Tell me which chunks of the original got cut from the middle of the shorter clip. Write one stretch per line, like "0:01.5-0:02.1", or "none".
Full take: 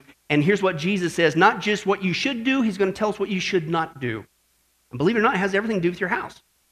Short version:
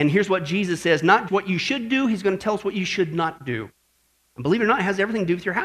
0:01.6-0:01.8